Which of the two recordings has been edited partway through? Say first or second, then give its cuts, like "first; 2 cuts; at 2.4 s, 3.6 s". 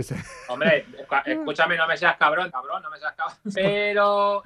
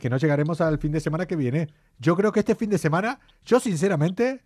first; 2 cuts; at 2.5 s, 3.5 s